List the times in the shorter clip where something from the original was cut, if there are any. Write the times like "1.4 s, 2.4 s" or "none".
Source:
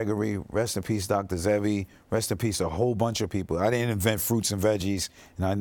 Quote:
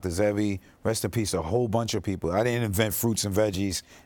none